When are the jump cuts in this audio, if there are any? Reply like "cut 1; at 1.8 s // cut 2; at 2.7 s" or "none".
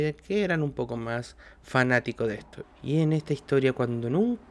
cut 1; at 2.6 s